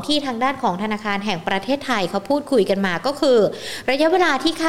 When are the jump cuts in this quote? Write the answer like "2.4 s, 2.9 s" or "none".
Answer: none